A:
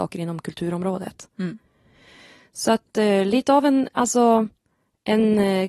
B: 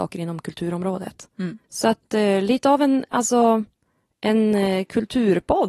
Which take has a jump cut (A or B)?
B